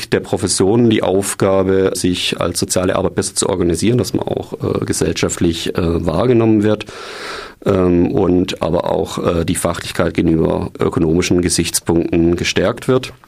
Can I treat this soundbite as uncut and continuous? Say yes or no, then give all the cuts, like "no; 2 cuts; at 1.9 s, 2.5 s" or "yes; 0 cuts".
no; 1 cut; at 1.9 s